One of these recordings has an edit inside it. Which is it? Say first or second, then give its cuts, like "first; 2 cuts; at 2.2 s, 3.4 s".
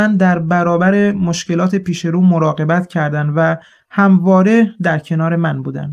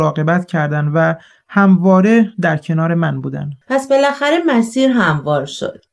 second; 1 cut; at 3.6 s